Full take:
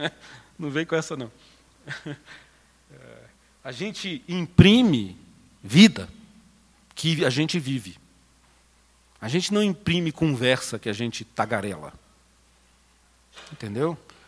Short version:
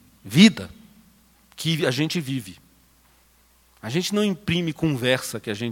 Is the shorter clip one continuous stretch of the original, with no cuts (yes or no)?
yes